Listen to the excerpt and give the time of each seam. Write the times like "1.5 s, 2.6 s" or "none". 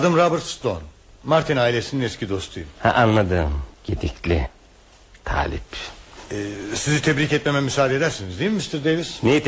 3.7 s